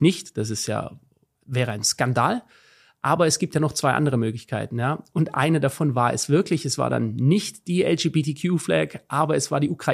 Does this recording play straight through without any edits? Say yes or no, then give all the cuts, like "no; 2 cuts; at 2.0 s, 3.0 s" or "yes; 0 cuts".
yes; 0 cuts